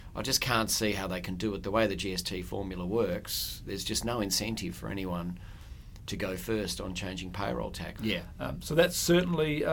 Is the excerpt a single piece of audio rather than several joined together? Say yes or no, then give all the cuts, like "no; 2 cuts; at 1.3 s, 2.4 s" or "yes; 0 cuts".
no; 1 cut; at 8.0 s